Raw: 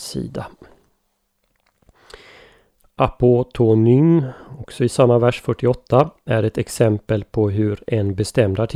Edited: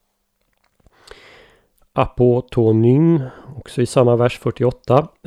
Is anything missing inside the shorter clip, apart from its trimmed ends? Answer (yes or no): no